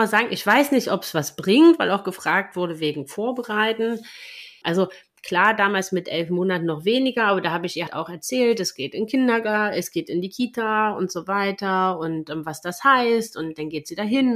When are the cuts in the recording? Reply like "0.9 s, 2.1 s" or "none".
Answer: 4.6 s, 7.9 s

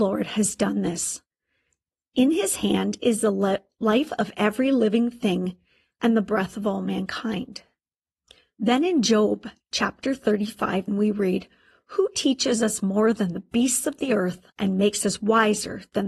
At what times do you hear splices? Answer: 10.9 s, 14.5 s

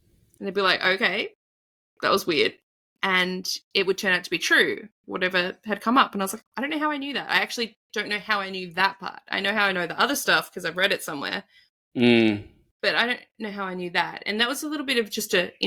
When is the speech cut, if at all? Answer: 6.4 s

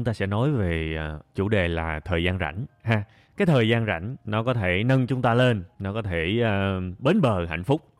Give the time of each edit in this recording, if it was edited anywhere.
7.0 s

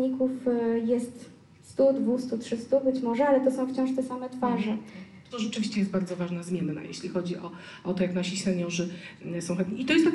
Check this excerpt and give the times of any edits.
5.3 s

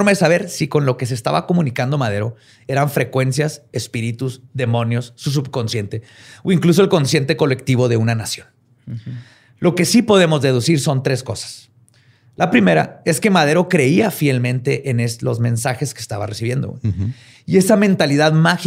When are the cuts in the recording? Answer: none

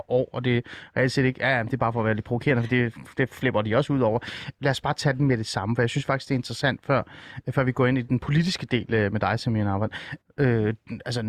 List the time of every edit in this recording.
4.6 s, 10.2 s

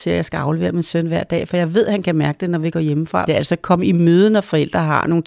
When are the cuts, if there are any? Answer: 3.3 s

